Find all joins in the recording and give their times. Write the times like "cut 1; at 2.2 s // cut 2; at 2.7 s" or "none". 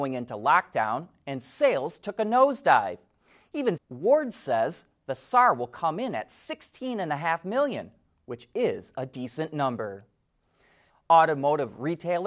cut 1; at 3.8 s // cut 2; at 10.9 s